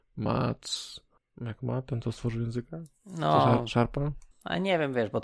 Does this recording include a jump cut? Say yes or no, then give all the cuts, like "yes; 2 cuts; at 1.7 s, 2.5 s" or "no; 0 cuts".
yes; 1 cut; at 4.3 s